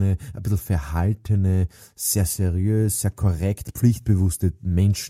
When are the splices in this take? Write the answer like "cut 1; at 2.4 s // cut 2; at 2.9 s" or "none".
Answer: none